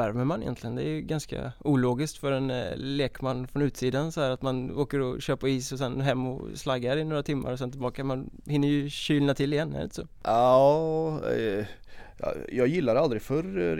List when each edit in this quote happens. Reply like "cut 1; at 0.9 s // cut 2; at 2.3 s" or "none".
none

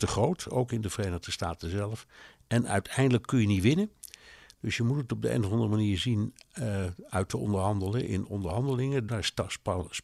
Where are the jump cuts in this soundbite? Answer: cut 1; at 9.1 s

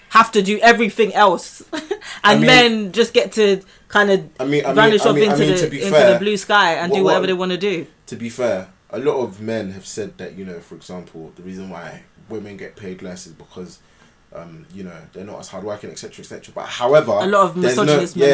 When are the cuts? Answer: none

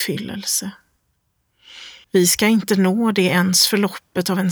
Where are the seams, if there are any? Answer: cut 1; at 2.0 s

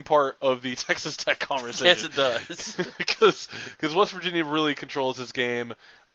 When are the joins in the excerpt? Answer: none

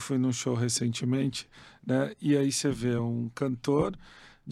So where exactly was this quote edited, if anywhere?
none

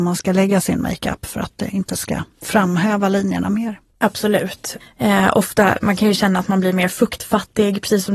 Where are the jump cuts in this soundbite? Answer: cut 1; at 4.8 s

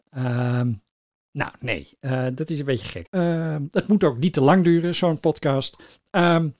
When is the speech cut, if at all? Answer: cut 1; at 3.1 s

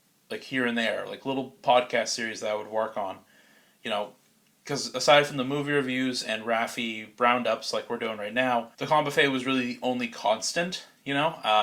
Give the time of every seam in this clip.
cut 1; at 8.7 s

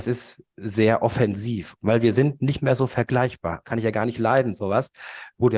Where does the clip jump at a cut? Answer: cut 1; at 1.7 s // cut 2; at 3.6 s

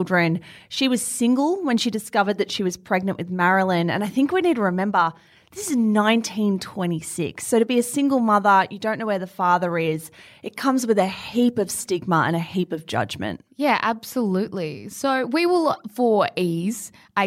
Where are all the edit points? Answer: none

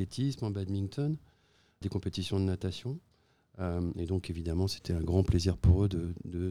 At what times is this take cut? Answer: none

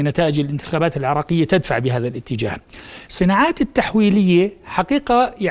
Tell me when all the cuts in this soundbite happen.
cut 1; at 3.1 s

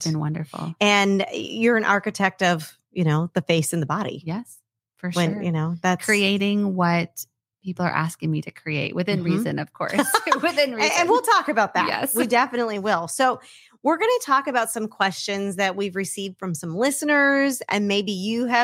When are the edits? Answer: none

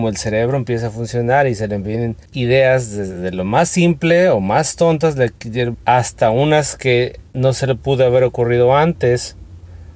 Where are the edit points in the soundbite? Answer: cut 1; at 2.3 s // cut 2; at 5.7 s // cut 3; at 7.3 s

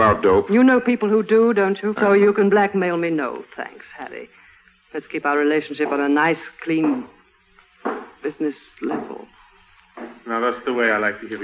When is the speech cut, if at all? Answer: cut 1; at 2.0 s

